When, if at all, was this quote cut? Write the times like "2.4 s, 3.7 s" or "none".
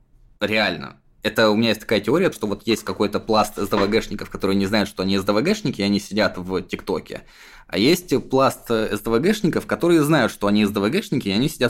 none